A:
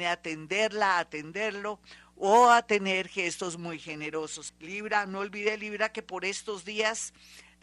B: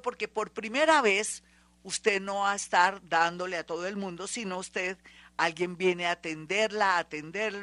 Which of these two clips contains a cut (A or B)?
A